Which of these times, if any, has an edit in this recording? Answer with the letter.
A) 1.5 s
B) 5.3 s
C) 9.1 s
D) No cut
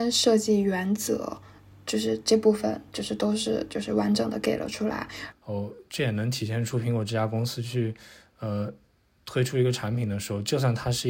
B